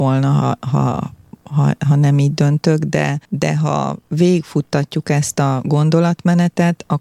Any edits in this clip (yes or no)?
yes